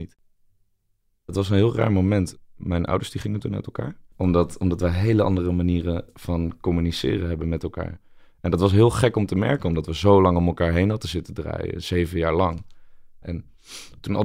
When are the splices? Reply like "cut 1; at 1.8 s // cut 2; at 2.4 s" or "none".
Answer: cut 1; at 4.1 s // cut 2; at 13.2 s